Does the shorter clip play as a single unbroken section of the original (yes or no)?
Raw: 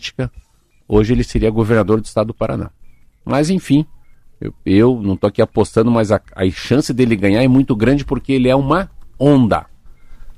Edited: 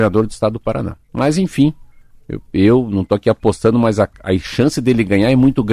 no